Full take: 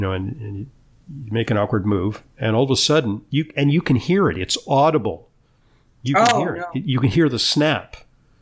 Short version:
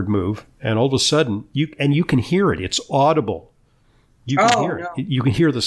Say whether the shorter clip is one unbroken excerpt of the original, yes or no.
yes